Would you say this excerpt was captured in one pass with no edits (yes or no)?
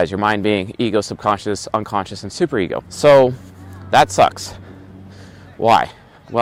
no